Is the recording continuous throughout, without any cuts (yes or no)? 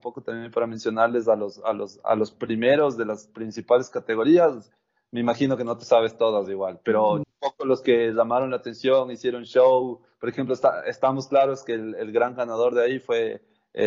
no